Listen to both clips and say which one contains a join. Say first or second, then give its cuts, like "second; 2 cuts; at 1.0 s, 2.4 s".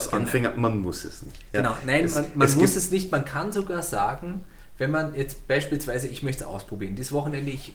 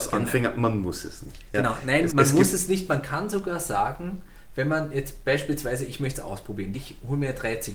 second; 2 cuts; at 2.1 s, 6.7 s